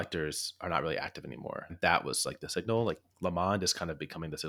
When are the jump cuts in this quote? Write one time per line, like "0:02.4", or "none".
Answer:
0:01.7
0:03.1